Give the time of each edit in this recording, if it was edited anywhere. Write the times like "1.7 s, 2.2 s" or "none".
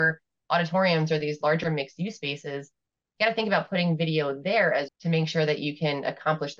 4.9 s